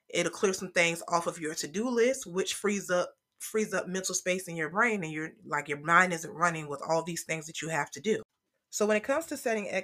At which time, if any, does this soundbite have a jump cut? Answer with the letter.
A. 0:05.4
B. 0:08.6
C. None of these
C